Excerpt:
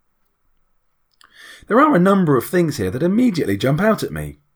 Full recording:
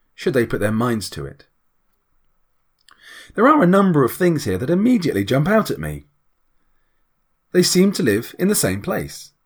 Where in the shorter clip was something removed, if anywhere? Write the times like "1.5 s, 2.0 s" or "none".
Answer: none